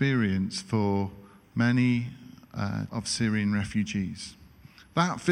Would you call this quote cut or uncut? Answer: cut